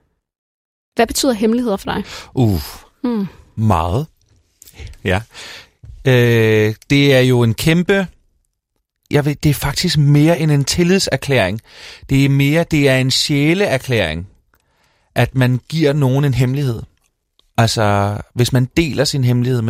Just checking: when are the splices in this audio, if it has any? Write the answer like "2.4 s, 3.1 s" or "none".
9.1 s

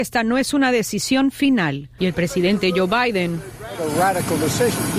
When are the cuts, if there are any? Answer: 2.0 s

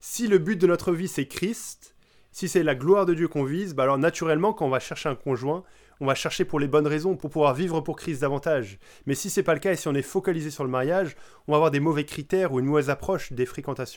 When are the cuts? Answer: 7.2 s

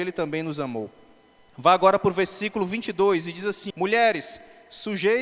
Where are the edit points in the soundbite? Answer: 3.7 s

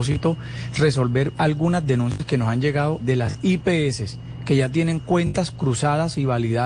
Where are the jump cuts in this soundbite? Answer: 3.0 s

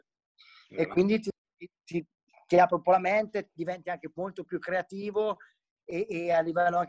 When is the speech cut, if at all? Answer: none

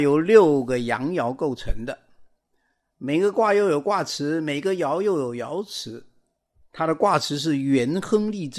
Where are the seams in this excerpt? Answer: 2.9 s, 6.6 s

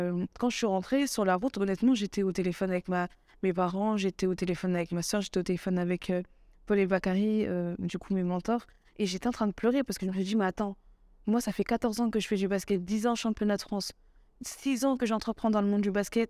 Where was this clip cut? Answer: none

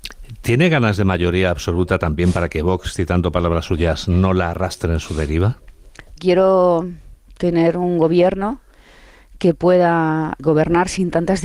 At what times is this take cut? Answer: 6.2 s, 10.4 s

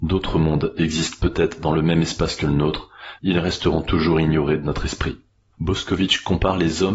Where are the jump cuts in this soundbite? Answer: 3.2 s, 5.5 s

